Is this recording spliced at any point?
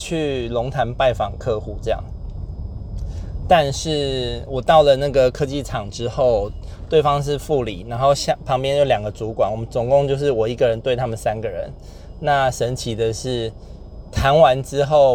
yes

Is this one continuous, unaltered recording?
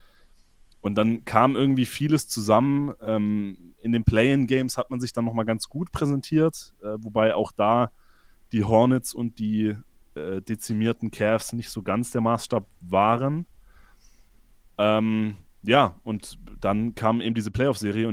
yes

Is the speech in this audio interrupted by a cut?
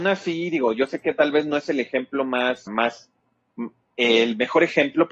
yes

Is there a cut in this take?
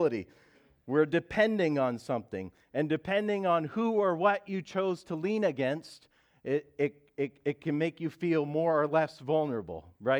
no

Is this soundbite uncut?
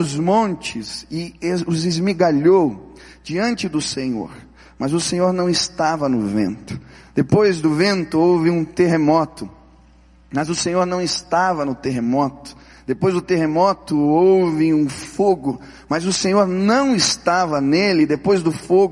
yes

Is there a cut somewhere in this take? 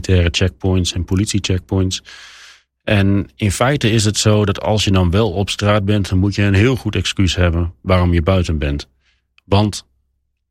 no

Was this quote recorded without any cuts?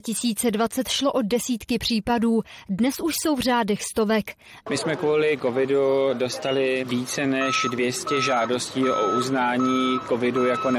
no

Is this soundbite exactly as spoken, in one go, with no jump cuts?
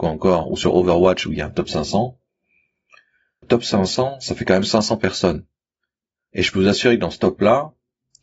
no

